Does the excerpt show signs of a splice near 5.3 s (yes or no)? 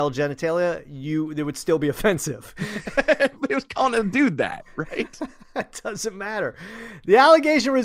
no